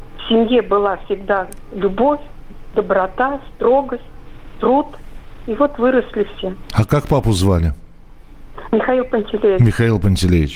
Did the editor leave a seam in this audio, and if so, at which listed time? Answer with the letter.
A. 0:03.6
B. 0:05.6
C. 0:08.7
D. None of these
D